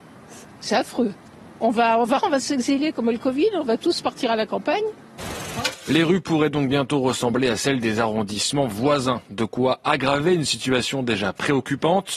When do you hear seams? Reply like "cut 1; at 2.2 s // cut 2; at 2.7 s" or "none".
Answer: cut 1; at 2.2 s